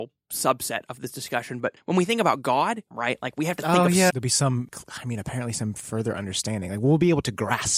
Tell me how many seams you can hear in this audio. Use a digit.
2